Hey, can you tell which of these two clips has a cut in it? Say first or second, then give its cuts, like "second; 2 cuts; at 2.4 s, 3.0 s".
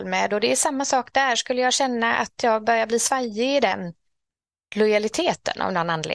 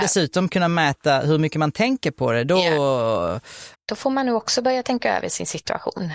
second; 1 cut; at 3.7 s